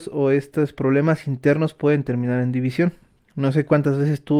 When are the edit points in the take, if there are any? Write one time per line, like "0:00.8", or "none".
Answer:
none